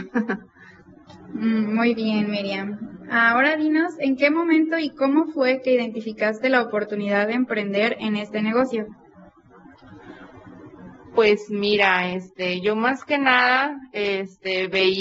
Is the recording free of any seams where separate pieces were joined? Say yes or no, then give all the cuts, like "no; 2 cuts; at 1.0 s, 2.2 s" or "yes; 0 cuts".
yes; 0 cuts